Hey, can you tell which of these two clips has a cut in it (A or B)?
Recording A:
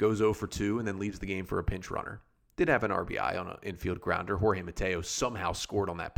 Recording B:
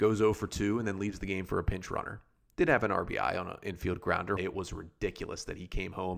B